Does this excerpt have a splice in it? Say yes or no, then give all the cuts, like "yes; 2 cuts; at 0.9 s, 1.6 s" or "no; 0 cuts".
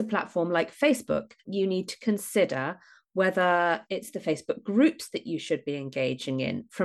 yes; 1 cut; at 1.5 s